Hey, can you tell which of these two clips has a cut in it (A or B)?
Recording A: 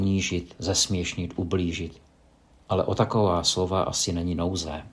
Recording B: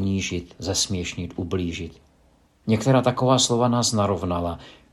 B